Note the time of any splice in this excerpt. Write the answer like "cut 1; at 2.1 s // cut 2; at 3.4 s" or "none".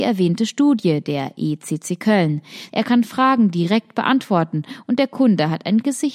cut 1; at 2.7 s